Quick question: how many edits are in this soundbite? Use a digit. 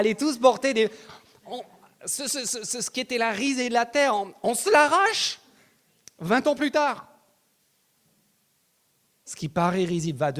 1